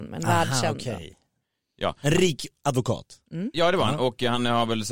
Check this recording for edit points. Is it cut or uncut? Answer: uncut